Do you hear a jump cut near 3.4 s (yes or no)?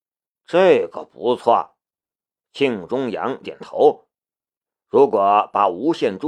yes